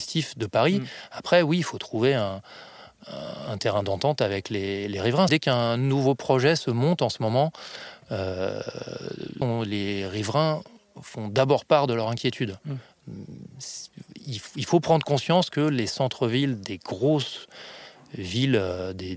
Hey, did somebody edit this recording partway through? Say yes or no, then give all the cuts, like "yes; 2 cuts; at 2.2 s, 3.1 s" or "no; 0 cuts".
yes; 2 cuts; at 5.3 s, 9.4 s